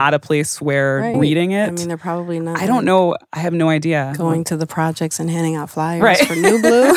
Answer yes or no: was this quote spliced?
yes